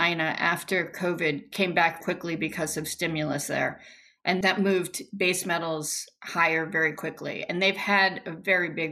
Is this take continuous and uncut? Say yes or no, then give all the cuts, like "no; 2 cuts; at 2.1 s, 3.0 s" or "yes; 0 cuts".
no; 1 cut; at 2.0 s